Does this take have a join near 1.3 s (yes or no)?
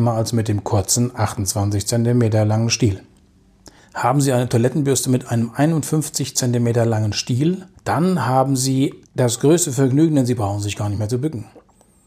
no